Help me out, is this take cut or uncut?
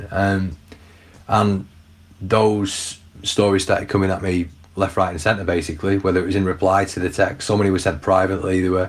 uncut